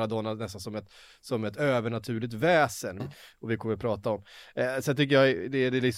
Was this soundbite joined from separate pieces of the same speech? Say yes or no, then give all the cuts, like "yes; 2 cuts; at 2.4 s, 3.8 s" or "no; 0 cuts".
yes; 1 cut; at 3.0 s